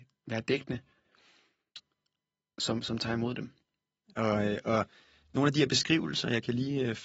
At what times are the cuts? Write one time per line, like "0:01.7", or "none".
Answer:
0:04.1